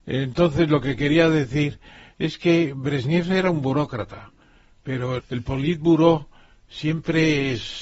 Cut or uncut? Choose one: cut